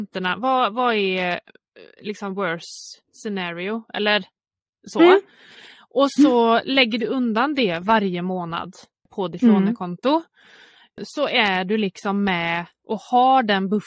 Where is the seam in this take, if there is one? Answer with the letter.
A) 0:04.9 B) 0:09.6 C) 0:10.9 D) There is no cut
D